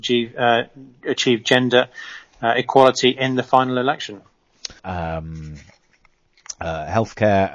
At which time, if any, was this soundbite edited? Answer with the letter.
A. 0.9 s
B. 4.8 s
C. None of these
B